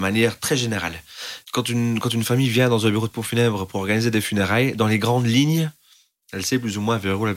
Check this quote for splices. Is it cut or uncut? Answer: cut